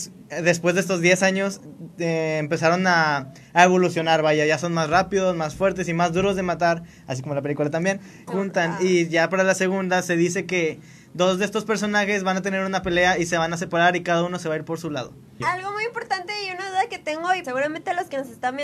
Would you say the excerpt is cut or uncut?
cut